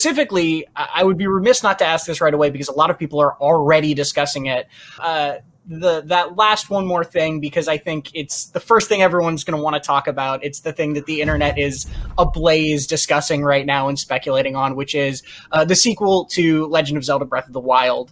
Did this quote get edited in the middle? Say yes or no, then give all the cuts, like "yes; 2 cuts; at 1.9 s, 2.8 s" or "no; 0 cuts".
yes; 1 cut; at 5.0 s